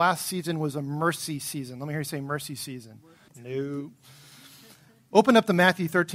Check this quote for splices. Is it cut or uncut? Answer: cut